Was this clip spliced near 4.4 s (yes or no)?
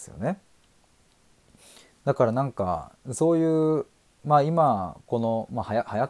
no